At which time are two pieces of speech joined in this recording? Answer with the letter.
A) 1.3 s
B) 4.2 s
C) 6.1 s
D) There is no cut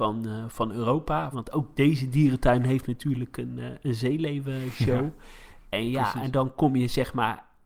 A